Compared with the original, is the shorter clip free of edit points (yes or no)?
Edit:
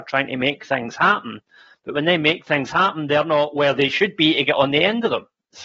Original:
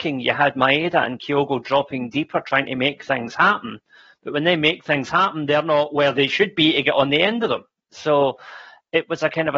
yes